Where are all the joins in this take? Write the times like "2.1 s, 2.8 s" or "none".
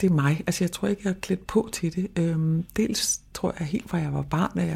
none